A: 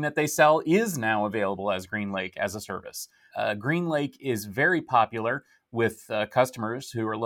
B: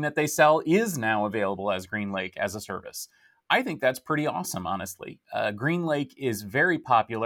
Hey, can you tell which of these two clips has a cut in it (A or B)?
A